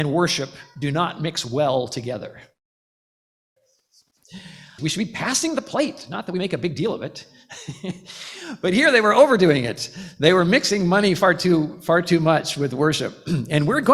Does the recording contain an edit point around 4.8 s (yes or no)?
yes